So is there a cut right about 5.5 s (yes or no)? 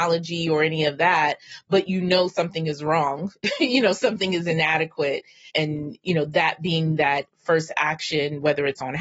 yes